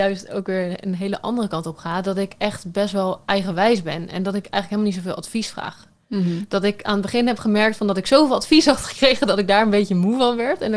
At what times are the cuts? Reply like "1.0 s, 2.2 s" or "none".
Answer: none

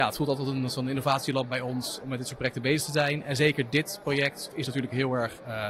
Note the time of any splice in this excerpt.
2.0 s, 4.5 s

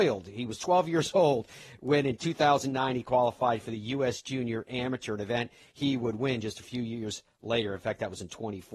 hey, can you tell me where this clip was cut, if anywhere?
none

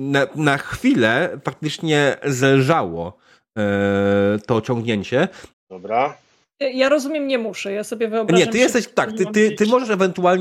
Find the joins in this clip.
5.5 s

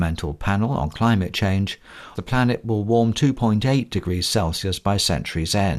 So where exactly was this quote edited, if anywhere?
2.1 s

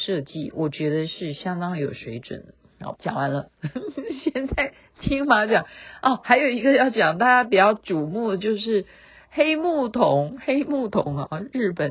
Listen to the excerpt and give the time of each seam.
2.9 s

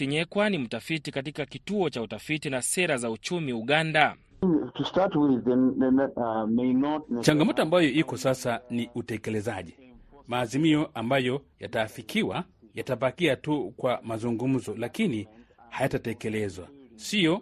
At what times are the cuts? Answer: 6.1 s

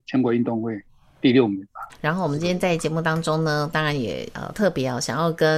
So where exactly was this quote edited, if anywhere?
1.9 s

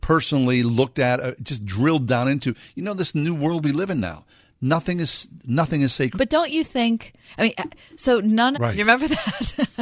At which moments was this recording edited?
6.1 s, 8.5 s

